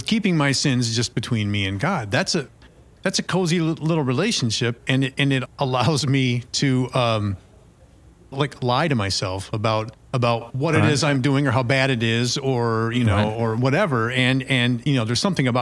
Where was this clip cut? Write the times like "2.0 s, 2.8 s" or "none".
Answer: 5.4 s